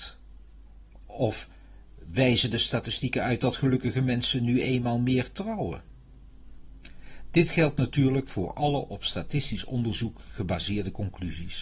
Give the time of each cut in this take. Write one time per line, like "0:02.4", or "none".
none